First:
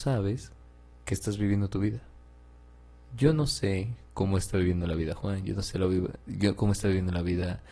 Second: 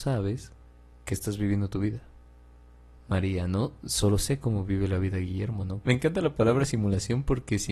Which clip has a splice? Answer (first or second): second